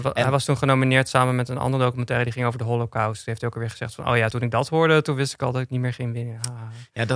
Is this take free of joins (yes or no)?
yes